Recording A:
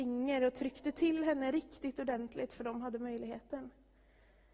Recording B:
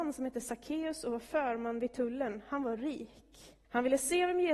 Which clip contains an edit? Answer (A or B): B